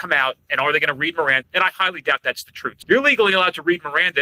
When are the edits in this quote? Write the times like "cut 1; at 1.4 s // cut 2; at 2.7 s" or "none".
cut 1; at 1.4 s // cut 2; at 2.8 s